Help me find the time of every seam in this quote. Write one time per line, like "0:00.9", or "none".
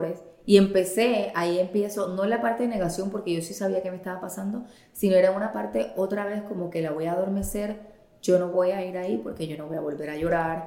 none